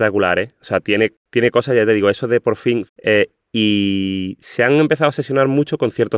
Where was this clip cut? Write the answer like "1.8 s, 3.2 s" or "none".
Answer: 1.2 s, 2.9 s